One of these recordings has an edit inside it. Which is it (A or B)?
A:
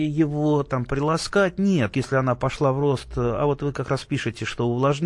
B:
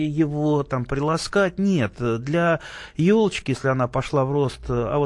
A